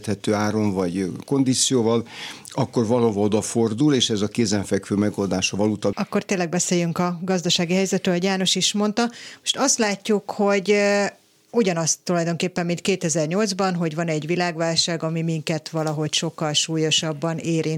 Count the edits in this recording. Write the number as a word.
one